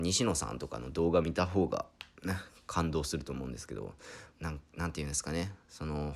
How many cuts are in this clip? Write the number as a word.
one